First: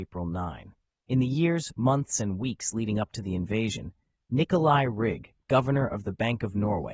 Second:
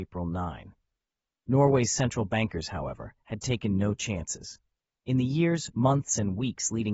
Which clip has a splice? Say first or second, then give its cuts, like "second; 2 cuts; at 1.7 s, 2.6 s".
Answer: first; 1 cut; at 0.9 s